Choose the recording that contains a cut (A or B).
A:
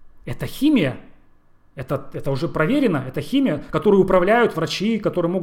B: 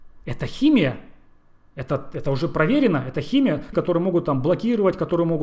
B